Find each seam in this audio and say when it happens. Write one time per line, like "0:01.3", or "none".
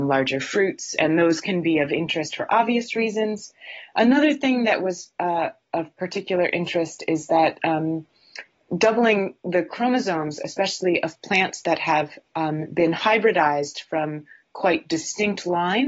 none